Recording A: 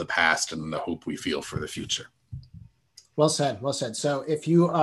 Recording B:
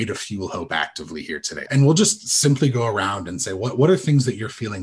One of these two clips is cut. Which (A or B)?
B